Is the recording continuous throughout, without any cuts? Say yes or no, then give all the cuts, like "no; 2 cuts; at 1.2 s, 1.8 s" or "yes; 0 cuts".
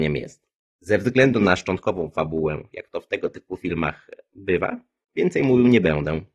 yes; 0 cuts